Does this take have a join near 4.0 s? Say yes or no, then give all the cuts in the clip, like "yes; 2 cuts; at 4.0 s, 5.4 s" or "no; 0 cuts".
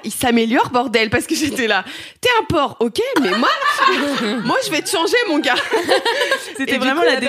yes; 1 cut; at 4.0 s